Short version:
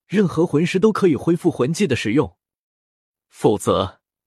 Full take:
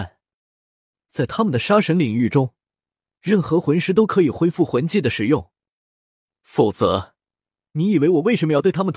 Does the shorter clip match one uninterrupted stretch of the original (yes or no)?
yes